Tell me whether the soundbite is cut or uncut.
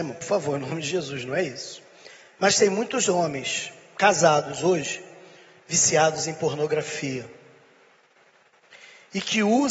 uncut